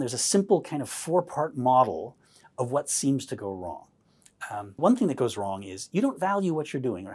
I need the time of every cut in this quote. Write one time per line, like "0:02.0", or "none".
0:04.8